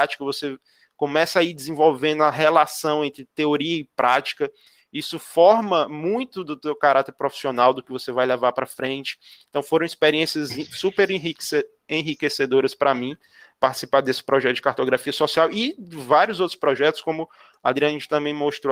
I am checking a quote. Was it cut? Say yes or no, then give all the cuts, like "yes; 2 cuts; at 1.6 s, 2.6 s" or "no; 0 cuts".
no; 0 cuts